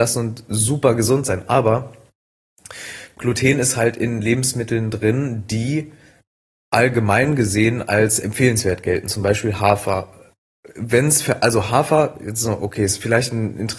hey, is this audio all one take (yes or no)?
yes